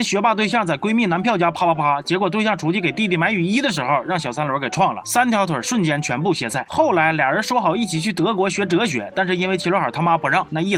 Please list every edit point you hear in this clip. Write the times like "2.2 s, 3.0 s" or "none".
none